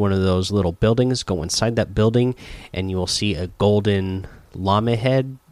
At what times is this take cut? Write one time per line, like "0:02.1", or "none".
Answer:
none